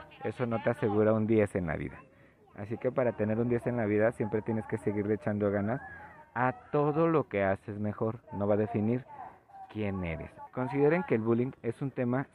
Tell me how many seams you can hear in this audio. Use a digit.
2